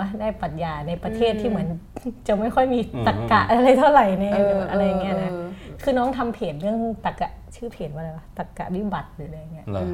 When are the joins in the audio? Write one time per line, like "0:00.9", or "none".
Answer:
0:07.2